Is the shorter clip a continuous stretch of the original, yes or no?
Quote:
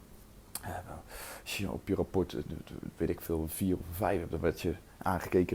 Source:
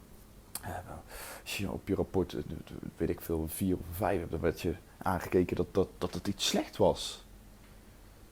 yes